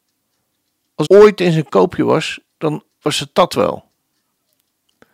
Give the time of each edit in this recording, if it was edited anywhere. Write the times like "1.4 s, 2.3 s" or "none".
1.0 s